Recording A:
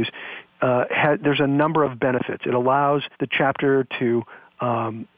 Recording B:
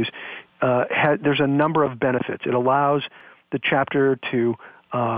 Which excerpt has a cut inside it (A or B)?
A